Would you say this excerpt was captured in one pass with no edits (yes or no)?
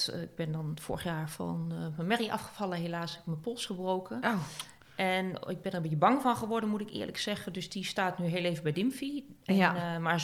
yes